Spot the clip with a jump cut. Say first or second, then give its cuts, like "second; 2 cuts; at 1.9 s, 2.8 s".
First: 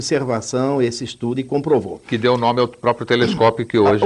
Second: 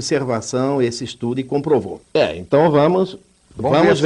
second; 1 cut; at 2.0 s